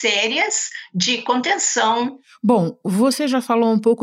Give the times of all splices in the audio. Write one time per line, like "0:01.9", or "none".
none